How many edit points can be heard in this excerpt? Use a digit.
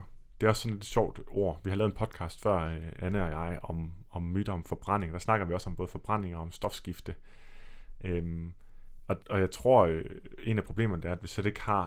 1